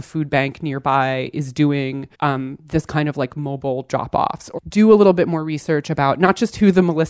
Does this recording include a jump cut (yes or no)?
yes